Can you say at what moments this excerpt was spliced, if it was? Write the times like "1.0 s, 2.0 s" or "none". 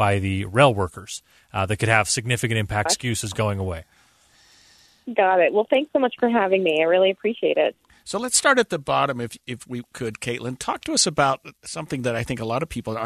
2.9 s

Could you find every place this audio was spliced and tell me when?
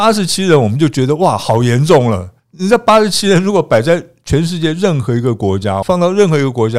2.4 s, 5.8 s

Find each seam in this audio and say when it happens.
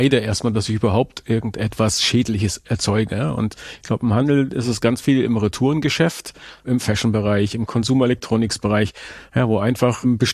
none

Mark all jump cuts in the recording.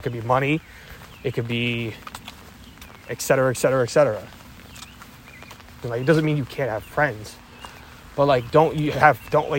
5.8 s

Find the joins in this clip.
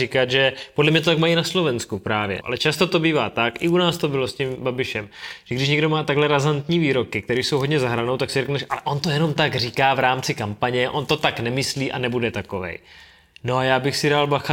2.4 s

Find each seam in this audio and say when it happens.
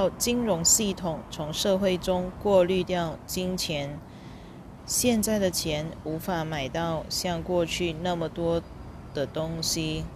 4.8 s

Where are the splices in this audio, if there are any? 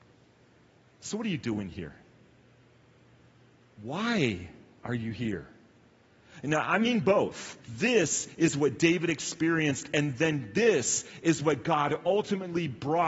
7.6 s

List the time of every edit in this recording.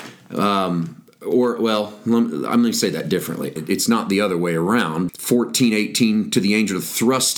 3.6 s, 5.1 s

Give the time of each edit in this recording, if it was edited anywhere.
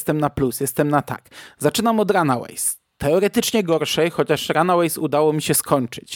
none

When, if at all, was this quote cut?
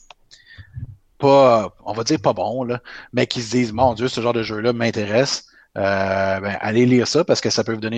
none

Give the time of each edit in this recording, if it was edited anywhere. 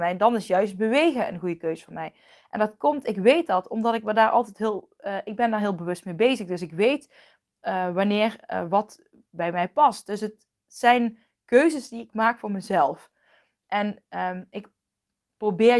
none

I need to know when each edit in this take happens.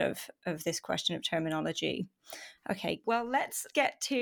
none

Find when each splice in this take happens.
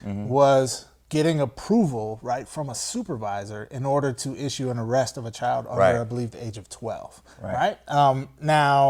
7.3 s

